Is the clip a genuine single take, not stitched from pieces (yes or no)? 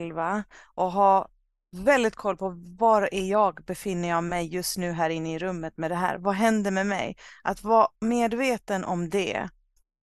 yes